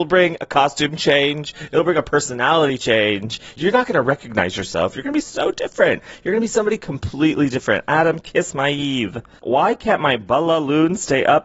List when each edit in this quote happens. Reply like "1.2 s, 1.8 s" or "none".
none